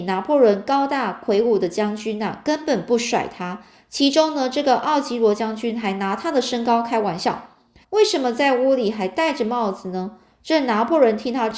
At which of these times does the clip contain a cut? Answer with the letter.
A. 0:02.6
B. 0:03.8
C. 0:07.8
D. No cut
C